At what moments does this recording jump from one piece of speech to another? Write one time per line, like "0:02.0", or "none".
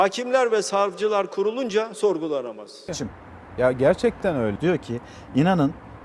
0:02.9
0:04.6

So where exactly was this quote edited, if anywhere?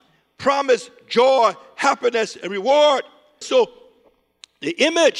0:03.4

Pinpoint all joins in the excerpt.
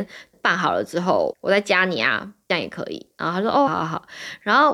0:03.7

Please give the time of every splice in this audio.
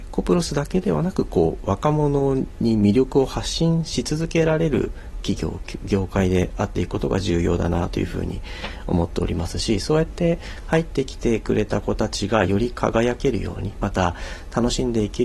none

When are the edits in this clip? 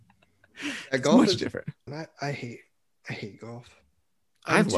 0:01.9

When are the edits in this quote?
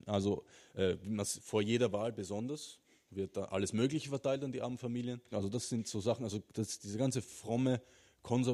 0:05.3

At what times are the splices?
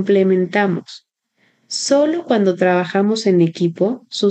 0:01.6

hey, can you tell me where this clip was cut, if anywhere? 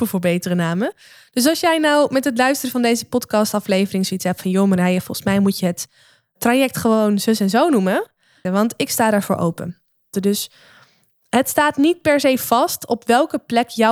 0:08.4
0:10.1

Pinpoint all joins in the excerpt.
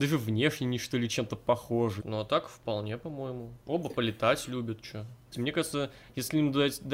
0:02.0
0:03.6
0:05.3

